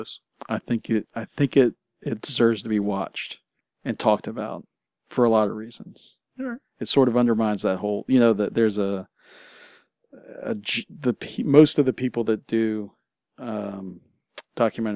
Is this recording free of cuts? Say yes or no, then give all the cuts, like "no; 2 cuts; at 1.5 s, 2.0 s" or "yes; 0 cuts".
yes; 0 cuts